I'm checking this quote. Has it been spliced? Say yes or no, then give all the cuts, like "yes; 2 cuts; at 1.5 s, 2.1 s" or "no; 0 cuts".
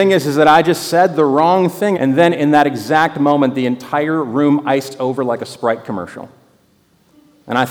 yes; 1 cut; at 1.9 s